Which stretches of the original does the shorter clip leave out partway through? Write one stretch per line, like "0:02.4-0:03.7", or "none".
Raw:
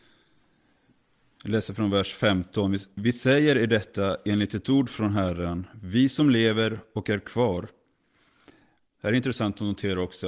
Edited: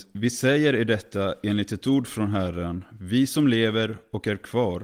none